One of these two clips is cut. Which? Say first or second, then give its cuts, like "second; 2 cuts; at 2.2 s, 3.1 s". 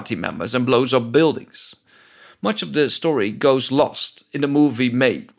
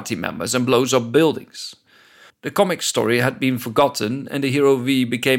second; 1 cut; at 2.3 s